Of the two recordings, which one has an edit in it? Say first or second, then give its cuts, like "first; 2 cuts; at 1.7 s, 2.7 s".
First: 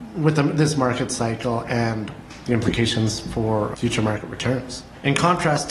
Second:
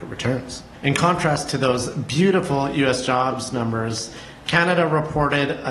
first; 1 cut; at 3.7 s